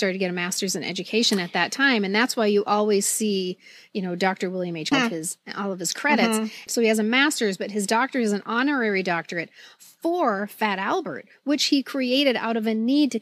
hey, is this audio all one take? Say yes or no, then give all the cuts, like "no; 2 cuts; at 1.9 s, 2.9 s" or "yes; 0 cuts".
no; 2 cuts; at 4.9 s, 6.7 s